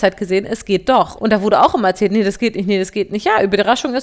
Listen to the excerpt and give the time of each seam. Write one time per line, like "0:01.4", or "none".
0:01.2